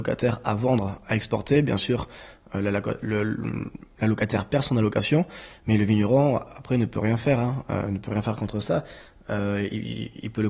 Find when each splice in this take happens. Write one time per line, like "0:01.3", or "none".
none